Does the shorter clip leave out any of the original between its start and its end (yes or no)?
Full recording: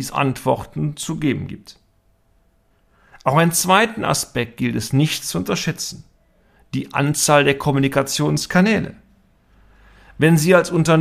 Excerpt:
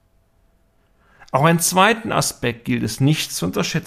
no